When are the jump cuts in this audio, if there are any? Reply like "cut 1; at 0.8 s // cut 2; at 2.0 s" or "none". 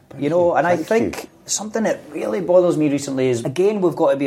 none